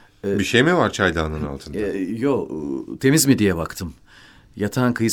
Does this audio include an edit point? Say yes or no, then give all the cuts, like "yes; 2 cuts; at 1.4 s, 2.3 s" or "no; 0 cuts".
no; 0 cuts